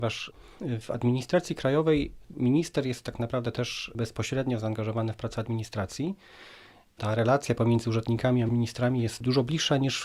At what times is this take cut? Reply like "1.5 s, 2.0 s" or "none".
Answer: none